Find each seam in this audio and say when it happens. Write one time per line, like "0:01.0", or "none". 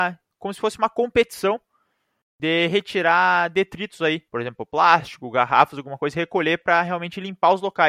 0:04.3

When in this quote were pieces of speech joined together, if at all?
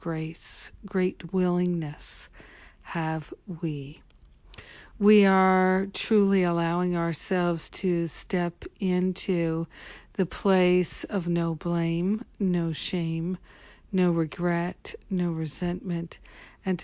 none

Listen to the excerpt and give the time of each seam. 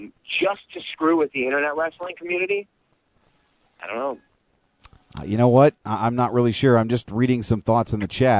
none

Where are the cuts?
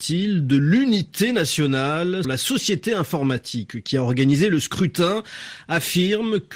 0:02.2

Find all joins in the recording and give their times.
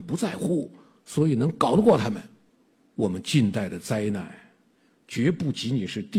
none

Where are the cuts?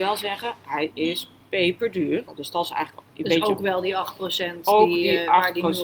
0:02.3

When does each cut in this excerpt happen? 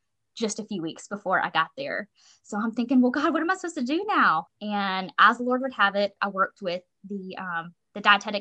0:04.5
0:06.2

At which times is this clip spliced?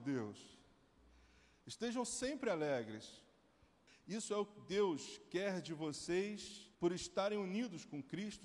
0:03.9
0:06.7

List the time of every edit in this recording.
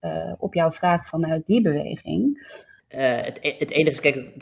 0:02.8

